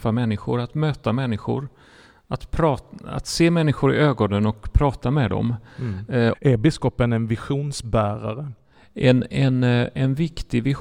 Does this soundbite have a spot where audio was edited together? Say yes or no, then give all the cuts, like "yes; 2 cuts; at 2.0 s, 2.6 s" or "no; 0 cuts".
yes; 1 cut; at 6.3 s